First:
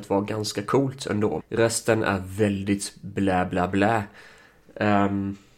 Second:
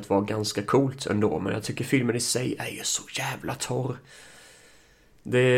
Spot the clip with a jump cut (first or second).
first